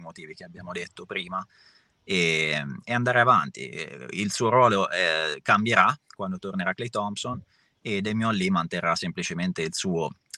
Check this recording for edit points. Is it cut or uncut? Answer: uncut